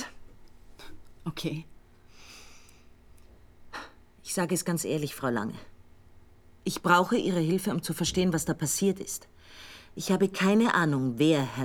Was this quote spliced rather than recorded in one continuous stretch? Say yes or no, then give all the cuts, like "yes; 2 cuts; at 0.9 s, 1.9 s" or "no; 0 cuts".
no; 0 cuts